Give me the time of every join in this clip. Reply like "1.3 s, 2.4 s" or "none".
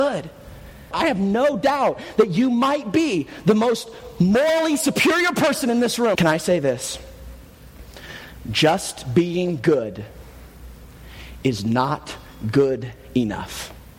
0.9 s, 6.2 s

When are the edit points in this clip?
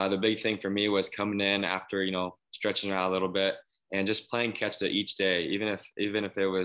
none

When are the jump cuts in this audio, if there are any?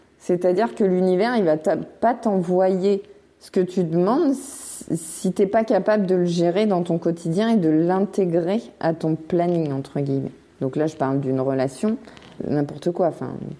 12.4 s

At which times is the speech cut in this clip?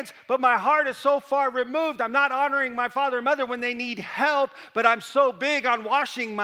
none

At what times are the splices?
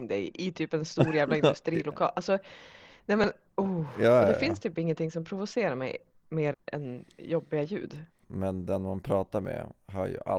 6.5 s, 8.2 s

